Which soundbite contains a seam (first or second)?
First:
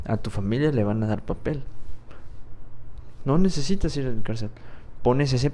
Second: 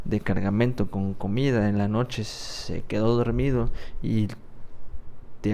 first